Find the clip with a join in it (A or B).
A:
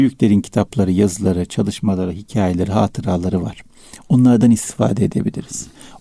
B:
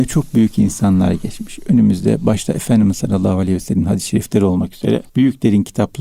B